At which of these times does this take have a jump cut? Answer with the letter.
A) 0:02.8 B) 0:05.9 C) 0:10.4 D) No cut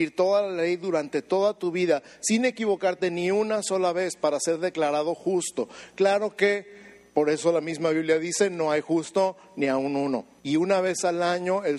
C